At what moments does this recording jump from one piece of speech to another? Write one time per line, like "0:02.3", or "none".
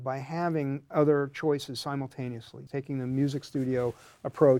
0:02.7